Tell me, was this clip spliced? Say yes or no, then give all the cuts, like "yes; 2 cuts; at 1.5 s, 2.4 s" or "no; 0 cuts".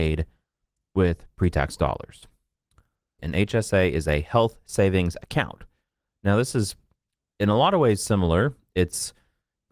yes; 1 cut; at 3.2 s